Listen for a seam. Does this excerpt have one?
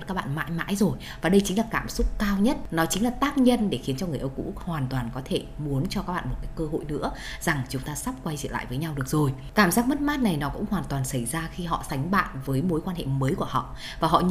yes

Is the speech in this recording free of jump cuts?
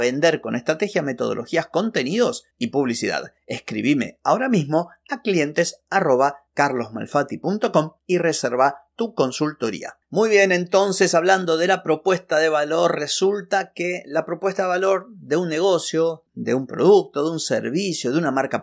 yes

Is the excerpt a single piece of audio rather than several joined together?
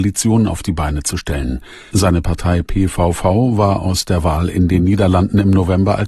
no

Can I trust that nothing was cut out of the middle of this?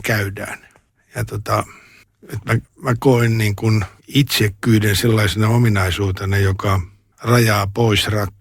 no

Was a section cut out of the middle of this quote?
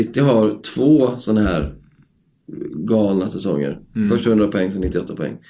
no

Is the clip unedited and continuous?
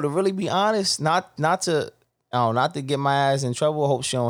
yes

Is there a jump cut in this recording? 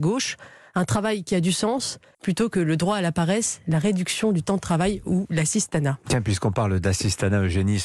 yes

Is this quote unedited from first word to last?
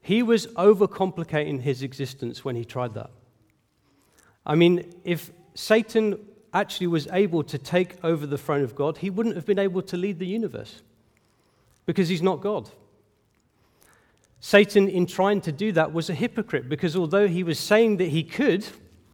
yes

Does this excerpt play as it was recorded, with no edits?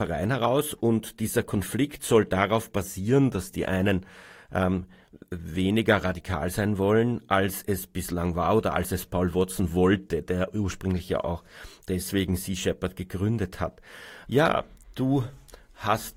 no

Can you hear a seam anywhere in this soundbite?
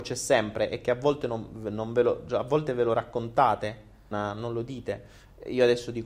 yes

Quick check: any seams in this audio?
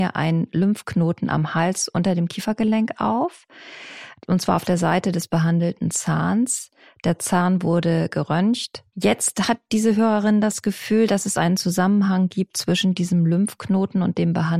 yes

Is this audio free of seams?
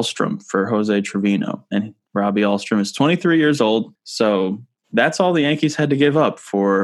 no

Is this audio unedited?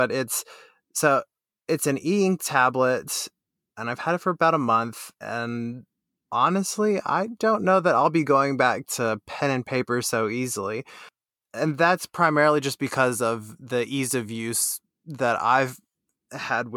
yes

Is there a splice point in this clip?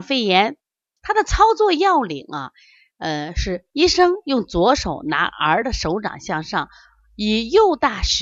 yes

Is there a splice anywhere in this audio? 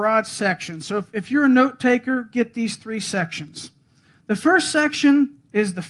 no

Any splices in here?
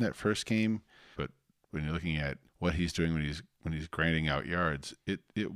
yes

